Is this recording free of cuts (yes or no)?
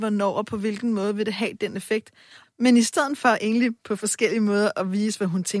no